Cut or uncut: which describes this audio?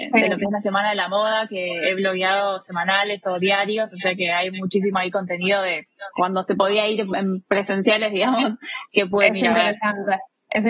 uncut